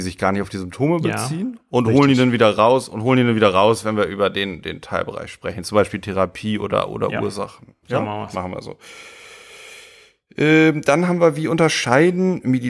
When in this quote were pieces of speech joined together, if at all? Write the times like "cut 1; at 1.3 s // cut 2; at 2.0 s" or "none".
none